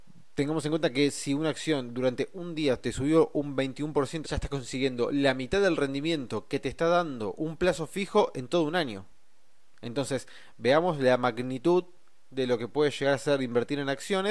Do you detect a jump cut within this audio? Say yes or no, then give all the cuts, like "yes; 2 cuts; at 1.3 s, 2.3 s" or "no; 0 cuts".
yes; 1 cut; at 4.2 s